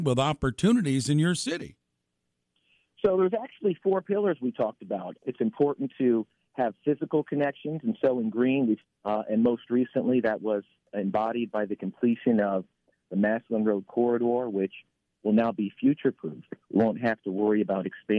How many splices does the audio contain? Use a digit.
2